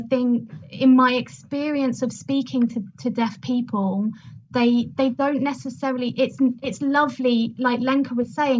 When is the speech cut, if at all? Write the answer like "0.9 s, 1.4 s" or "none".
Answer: none